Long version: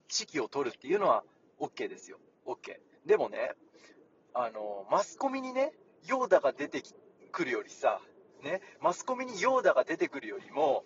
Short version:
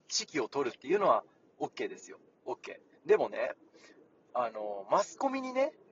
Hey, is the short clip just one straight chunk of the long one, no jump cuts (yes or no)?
yes